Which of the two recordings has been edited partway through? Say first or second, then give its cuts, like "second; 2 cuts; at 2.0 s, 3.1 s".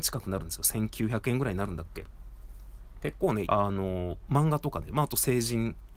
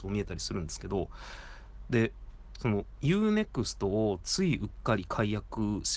first; 2 cuts; at 3.4 s, 4.9 s